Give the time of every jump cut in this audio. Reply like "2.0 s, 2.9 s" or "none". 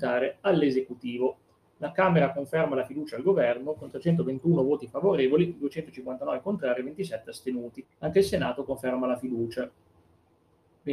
7.8 s